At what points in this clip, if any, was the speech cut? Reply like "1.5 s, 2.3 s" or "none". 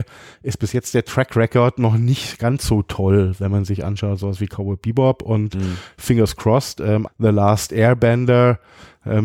7.1 s